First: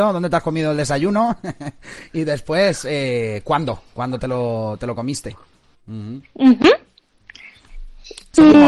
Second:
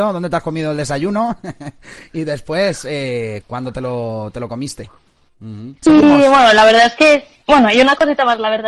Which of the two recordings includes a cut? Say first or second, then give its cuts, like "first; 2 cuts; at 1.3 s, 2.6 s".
second; 3 cuts; at 3.4 s, 5.8 s, 7.4 s